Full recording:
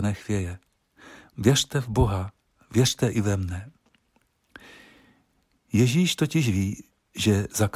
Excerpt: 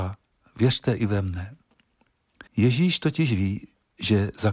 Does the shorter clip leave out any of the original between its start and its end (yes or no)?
yes